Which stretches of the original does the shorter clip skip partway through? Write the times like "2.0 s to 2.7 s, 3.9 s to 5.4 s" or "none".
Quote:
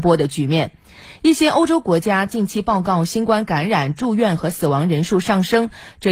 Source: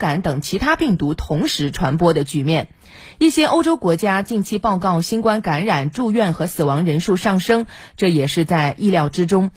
none